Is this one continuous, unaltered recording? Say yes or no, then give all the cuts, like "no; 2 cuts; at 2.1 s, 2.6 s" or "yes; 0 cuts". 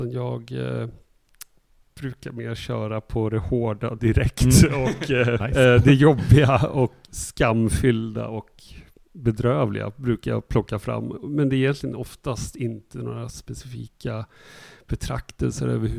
no; 2 cuts; at 5.4 s, 7.0 s